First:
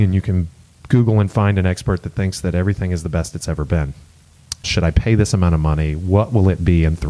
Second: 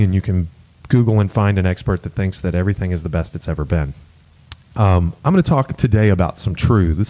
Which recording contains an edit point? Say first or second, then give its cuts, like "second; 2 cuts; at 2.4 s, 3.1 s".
first; 1 cut; at 4.6 s